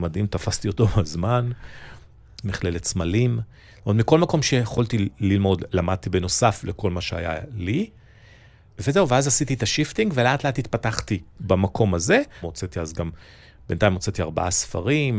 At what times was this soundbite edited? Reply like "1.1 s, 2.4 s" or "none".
2.4 s, 8.7 s, 12.4 s